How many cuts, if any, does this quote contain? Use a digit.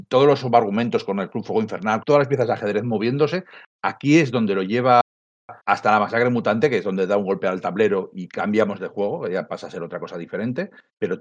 2